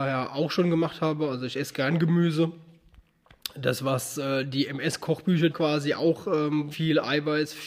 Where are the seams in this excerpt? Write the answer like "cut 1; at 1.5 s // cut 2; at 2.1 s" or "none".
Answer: cut 1; at 5.5 s // cut 2; at 6.7 s